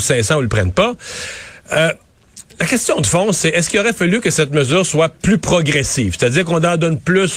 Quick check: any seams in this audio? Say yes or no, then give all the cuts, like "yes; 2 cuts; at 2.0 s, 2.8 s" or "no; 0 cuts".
no; 0 cuts